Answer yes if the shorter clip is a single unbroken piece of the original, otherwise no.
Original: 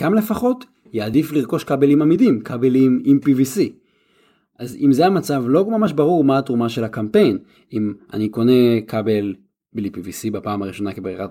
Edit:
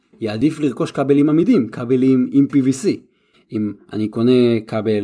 no